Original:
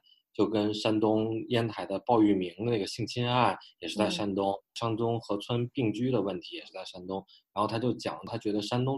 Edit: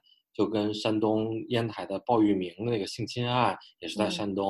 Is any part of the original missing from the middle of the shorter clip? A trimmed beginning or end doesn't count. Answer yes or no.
no